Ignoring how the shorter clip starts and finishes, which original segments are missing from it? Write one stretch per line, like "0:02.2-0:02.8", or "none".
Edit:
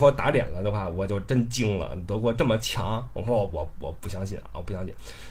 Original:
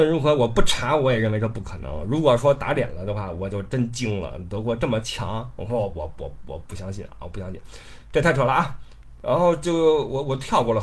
0:06.1-0:06.4